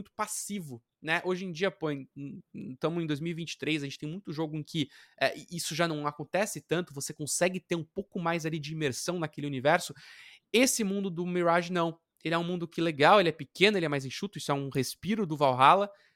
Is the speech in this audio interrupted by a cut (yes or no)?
no